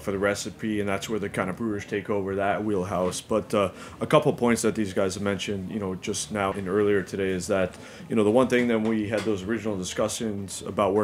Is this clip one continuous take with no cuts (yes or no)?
no